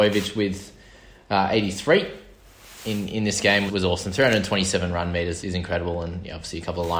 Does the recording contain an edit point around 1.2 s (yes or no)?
no